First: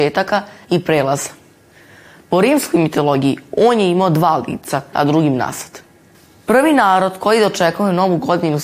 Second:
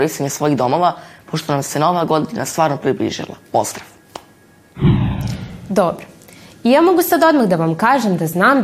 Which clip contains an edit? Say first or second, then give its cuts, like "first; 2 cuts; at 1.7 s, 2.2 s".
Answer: first; 1 cut; at 4.9 s